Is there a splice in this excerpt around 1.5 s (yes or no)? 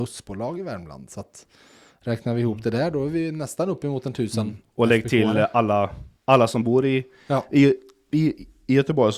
no